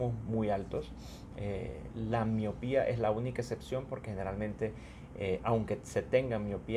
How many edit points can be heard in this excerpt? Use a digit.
0